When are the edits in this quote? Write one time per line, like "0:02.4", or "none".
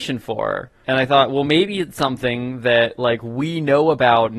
none